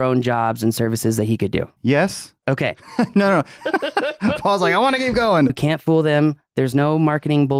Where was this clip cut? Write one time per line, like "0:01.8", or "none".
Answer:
0:01.8
0:03.6
0:05.5